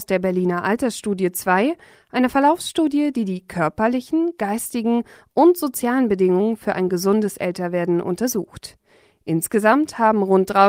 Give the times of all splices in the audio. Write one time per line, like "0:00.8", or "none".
none